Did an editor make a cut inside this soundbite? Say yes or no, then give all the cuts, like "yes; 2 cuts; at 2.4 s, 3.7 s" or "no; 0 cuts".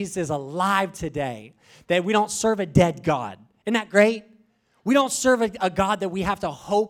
no; 0 cuts